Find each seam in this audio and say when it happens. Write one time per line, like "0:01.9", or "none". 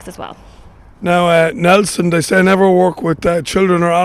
none